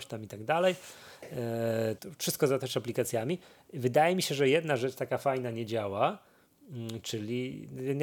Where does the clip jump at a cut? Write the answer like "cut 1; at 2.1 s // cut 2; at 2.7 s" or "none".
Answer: cut 1; at 2.0 s